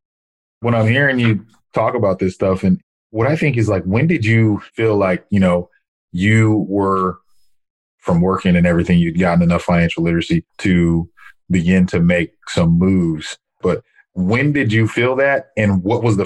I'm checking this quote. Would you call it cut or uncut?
cut